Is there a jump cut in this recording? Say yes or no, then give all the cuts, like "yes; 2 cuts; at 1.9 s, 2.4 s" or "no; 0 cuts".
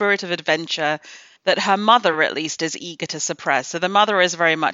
no; 0 cuts